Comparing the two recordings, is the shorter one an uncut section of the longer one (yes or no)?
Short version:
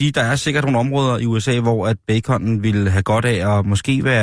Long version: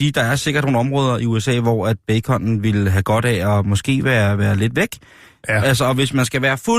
yes